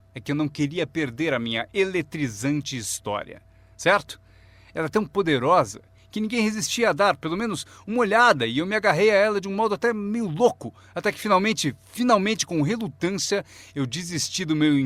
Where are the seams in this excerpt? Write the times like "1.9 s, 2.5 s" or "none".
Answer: none